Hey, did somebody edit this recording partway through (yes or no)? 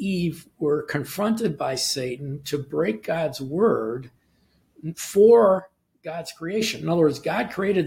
no